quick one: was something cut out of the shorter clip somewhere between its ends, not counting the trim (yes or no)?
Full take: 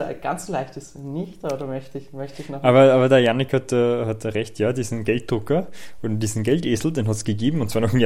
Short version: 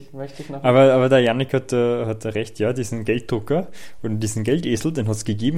no